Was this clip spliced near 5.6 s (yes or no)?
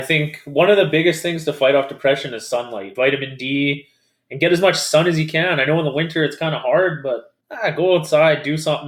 no